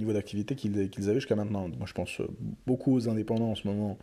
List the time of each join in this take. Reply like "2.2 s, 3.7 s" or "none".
1.7 s